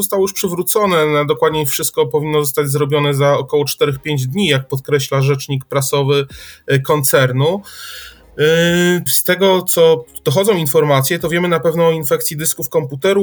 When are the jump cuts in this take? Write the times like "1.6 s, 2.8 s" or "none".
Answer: 9.1 s